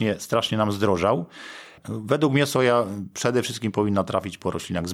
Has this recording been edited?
no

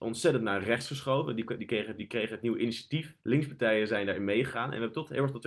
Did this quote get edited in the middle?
yes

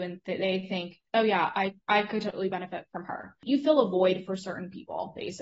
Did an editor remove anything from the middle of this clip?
yes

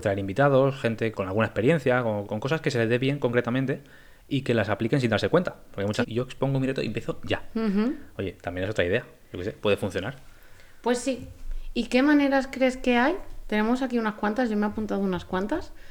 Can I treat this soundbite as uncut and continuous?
no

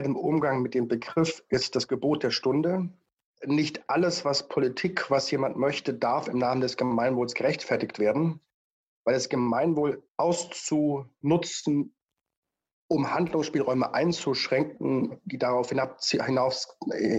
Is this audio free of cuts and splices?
no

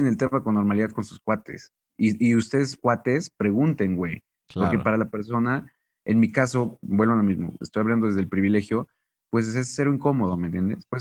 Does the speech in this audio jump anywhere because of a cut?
no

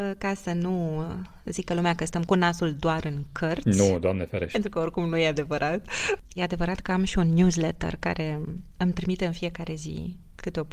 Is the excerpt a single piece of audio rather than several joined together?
no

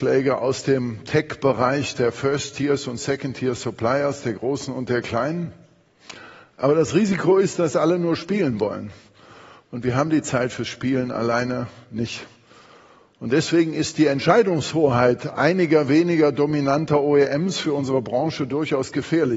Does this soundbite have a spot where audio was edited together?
no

